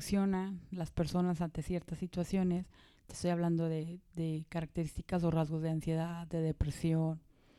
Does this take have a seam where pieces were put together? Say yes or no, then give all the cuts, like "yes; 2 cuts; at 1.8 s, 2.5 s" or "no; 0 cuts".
no; 0 cuts